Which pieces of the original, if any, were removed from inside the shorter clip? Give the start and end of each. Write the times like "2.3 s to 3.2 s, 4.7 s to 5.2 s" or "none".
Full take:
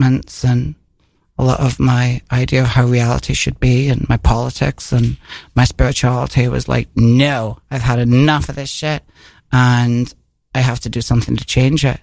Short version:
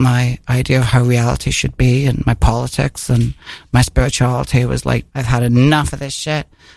6.9 s to 7.6 s

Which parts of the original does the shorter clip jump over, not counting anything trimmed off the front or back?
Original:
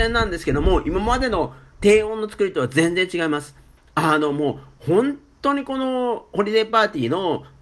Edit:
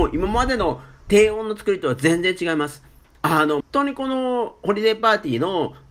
4.3 s to 5.3 s

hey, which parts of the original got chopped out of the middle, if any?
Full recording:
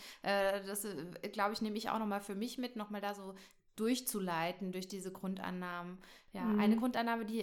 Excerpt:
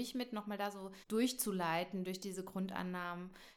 3.5 s to 3.7 s

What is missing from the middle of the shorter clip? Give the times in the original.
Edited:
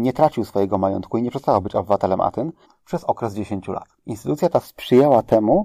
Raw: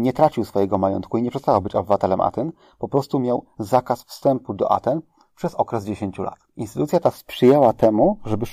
2.6 s to 5.2 s

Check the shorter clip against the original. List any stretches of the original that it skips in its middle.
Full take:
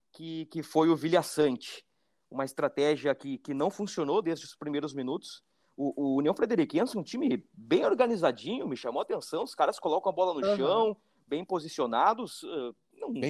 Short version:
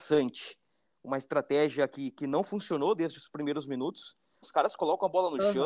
5.7 s to 9.5 s

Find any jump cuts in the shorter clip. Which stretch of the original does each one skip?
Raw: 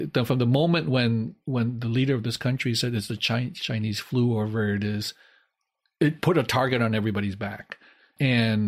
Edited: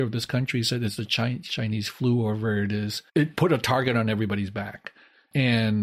5.2 s to 5.9 s

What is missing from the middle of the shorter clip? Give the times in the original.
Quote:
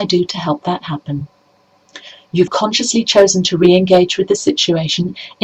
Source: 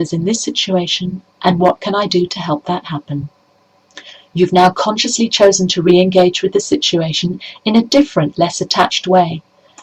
4.5 s to 4.7 s

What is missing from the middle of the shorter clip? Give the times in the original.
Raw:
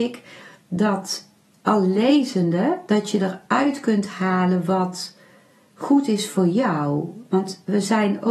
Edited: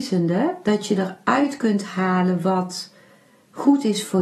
none

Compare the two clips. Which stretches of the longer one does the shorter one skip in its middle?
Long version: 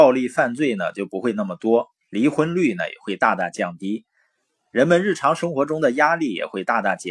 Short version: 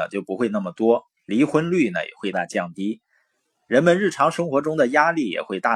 3.2 s to 3.4 s

